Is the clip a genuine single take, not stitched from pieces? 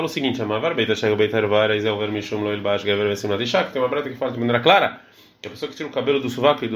yes; 0 cuts

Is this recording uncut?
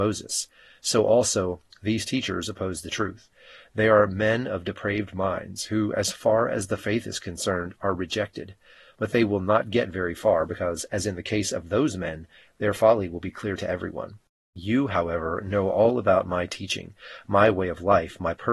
yes; 0 cuts

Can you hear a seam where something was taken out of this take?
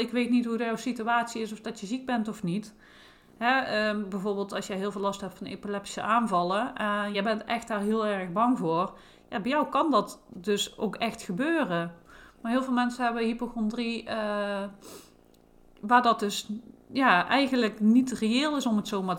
no; 0 cuts

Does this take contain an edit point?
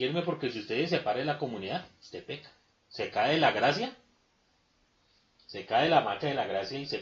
yes; 1 cut; at 2.7 s

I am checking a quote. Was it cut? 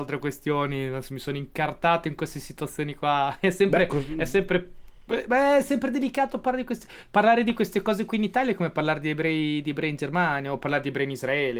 no; 0 cuts

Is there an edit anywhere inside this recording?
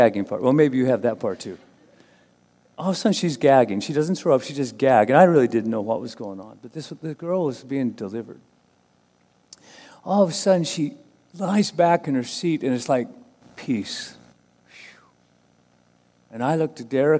no; 0 cuts

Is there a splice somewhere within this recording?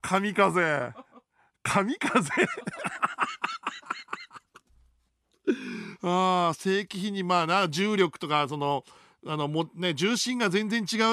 no; 0 cuts

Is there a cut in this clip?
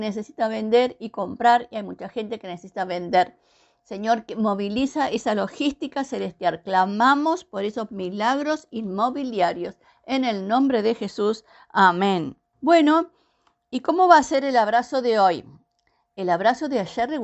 yes; 1 cut; at 12.5 s

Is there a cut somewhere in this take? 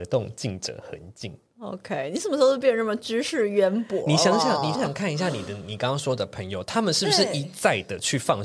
yes; 1 cut; at 4.7 s

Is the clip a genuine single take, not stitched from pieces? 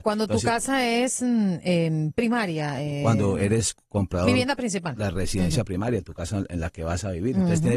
yes; 0 cuts

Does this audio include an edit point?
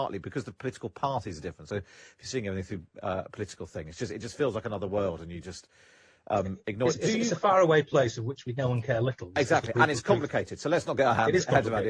no; 0 cuts

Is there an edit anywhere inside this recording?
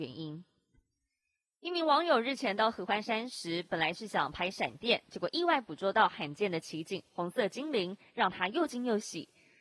no; 0 cuts

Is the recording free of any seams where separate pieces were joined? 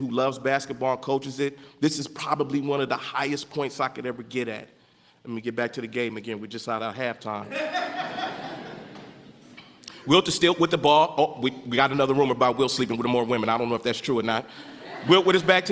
yes; 0 cuts

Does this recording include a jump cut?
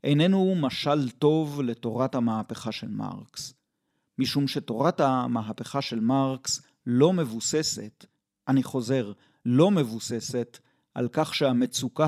no; 0 cuts

